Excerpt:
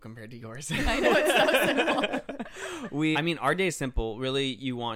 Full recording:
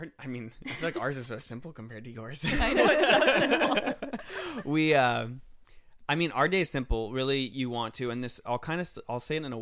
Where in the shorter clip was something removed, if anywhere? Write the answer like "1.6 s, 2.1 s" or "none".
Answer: 3.1 s